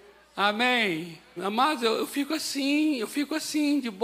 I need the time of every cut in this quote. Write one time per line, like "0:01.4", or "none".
0:01.4